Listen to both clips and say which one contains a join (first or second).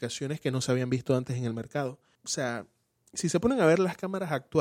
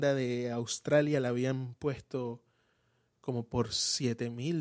first